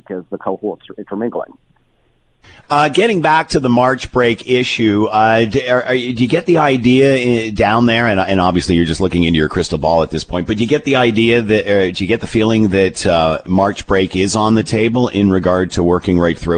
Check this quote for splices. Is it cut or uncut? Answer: uncut